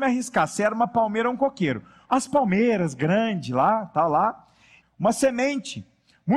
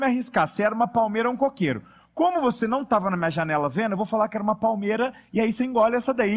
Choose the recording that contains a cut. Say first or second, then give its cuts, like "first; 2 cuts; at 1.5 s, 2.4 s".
first; 2 cuts; at 2.1 s, 4.8 s